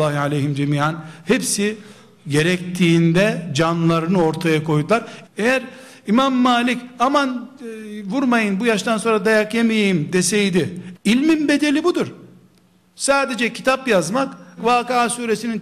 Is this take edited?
yes; 3 cuts; at 5.2 s, 10.9 s, 14.6 s

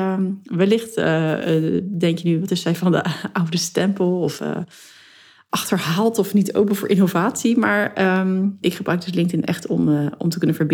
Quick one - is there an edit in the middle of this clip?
yes; 1 cut; at 8.6 s

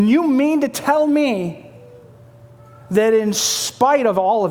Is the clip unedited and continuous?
yes; 0 cuts

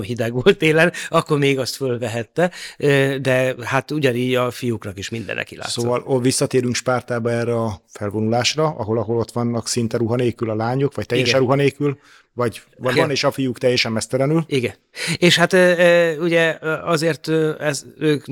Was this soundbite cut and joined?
yes; 1 cut; at 12.9 s

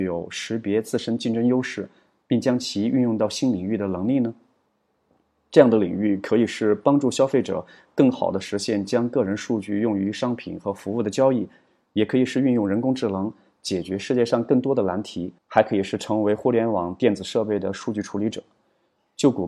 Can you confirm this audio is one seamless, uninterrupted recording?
no; 1 cut; at 15.4 s

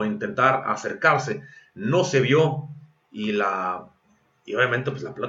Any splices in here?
no; 0 cuts

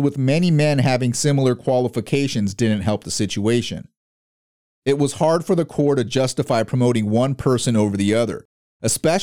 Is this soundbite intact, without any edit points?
no; 1 cut; at 4.7 s

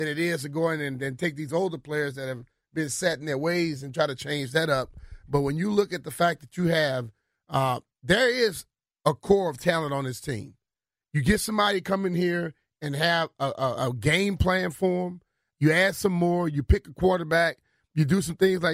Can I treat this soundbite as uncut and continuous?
yes; 0 cuts

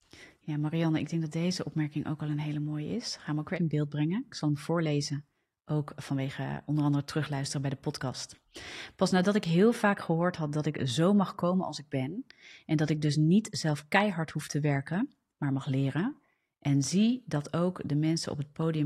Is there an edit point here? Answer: yes; 1 cut; at 3.6 s

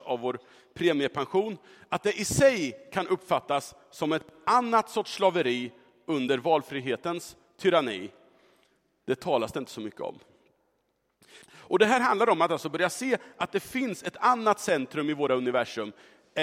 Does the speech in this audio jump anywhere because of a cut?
yes; 1 cut; at 11.4 s

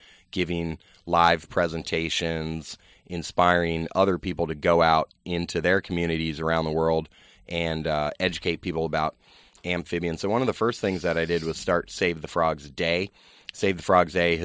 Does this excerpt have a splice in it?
no; 0 cuts

